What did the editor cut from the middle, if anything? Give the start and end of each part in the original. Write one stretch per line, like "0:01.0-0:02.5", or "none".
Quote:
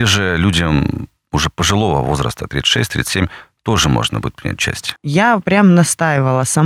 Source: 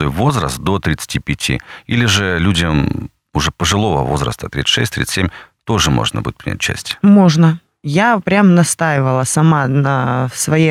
0:07.0-0:07.8